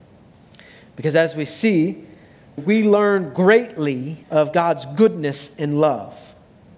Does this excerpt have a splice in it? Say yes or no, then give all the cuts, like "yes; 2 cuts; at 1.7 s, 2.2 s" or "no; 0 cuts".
yes; 2 cuts; at 2.6 s, 4.2 s